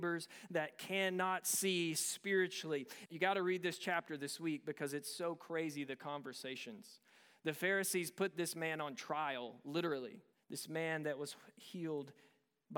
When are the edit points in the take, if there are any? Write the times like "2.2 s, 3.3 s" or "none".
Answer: 3.1 s, 10.3 s